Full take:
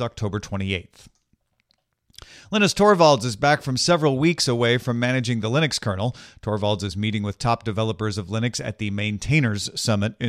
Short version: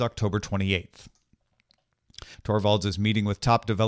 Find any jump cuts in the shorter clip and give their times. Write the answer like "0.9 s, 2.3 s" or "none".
2.3 s